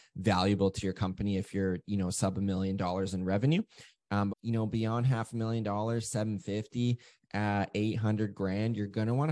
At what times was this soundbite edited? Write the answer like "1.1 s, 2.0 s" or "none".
4.3 s